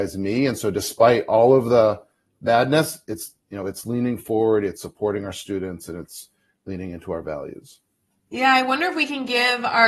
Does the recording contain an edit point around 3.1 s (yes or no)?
no